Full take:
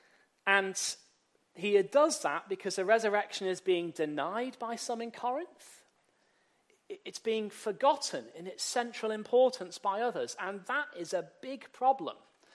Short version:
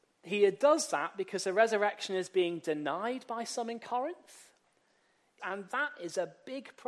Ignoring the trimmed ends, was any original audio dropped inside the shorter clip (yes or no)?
yes